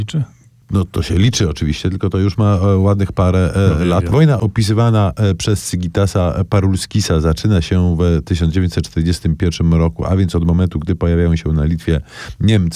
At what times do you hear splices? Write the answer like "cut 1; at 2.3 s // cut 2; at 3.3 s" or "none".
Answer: cut 1; at 4.1 s

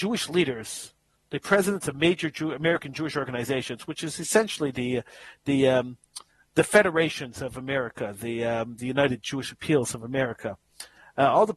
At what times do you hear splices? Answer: none

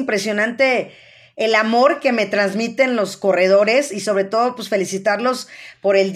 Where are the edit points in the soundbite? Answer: none

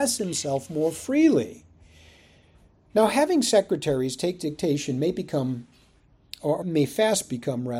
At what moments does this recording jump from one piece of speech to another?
cut 1; at 6.6 s

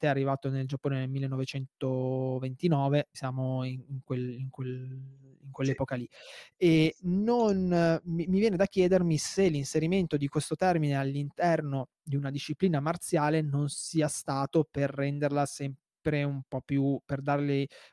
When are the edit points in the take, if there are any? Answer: cut 1; at 3.1 s

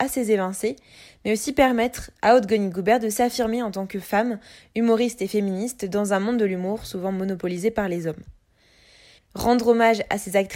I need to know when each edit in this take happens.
cut 1; at 9.2 s

